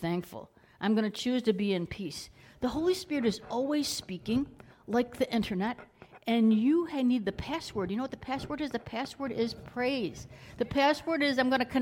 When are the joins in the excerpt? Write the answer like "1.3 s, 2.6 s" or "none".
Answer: none